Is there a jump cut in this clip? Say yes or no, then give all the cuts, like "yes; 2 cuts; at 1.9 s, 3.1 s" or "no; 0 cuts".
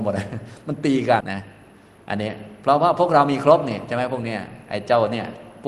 yes; 1 cut; at 1.2 s